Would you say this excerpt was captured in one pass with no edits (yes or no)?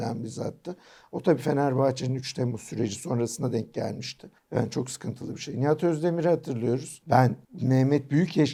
yes